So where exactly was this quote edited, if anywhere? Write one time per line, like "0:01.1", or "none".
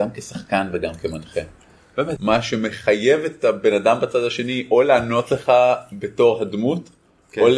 0:02.2